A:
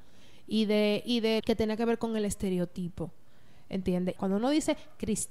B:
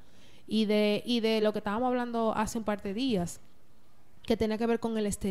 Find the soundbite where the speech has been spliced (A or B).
A